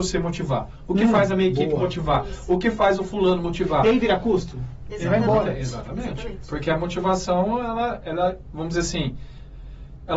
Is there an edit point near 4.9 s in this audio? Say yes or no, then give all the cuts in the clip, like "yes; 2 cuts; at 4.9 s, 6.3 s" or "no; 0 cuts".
yes; 1 cut; at 4.9 s